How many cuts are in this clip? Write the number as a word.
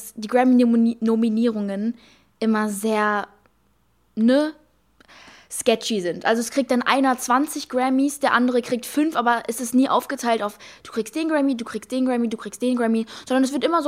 zero